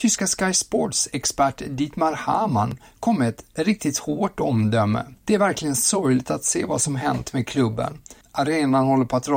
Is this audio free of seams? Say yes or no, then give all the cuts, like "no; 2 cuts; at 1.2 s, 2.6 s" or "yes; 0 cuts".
no; 2 cuts; at 5.2 s, 8.2 s